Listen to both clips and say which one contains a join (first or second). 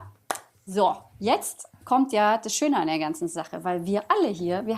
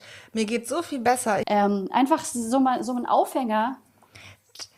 second